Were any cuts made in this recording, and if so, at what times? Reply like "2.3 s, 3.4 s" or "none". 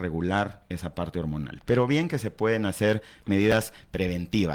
none